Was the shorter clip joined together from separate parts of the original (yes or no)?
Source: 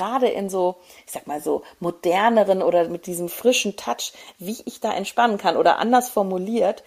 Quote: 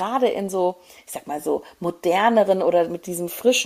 no